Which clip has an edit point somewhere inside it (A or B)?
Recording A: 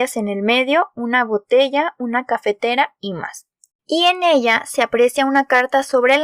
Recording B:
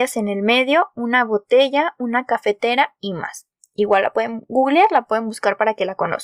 A